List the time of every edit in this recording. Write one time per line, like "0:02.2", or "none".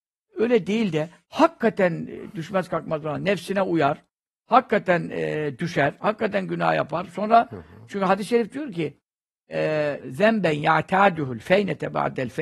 0:07.1
0:10.0